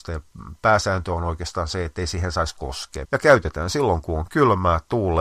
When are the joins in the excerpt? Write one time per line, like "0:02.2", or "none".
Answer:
0:03.0